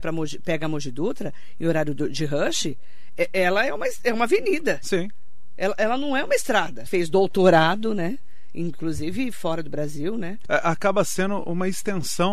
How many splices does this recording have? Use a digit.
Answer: 2